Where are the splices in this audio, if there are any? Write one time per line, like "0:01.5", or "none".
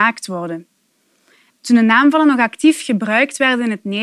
0:01.5